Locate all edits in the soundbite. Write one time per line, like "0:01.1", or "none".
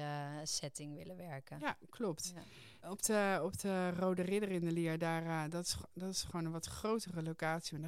0:02.8